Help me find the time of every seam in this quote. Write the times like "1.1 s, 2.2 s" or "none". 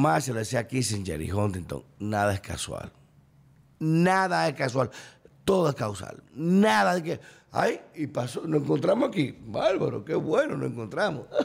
none